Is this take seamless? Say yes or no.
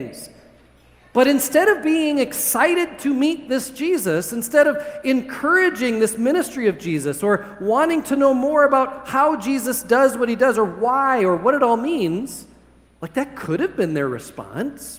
yes